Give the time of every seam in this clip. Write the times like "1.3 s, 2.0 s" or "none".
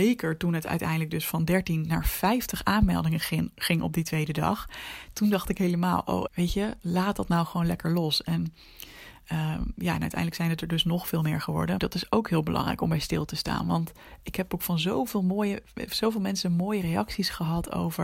6.3 s, 11.8 s